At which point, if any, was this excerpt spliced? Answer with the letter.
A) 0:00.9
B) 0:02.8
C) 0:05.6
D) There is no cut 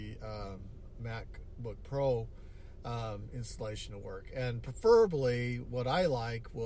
A